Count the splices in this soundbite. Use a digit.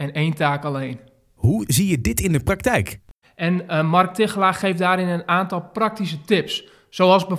1